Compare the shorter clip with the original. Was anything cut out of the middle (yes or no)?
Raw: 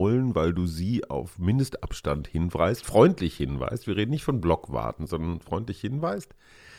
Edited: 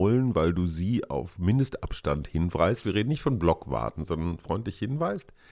yes